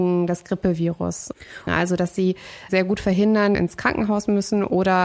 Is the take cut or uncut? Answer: cut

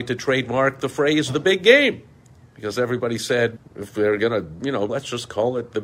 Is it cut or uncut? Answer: cut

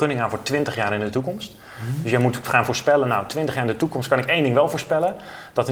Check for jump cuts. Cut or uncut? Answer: uncut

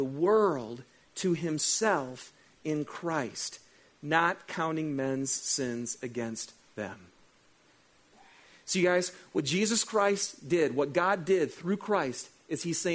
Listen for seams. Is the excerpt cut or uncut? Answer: uncut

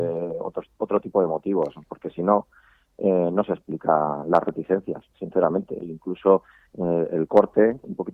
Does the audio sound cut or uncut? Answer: cut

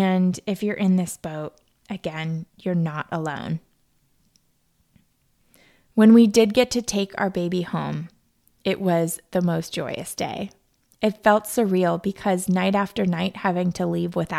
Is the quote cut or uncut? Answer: uncut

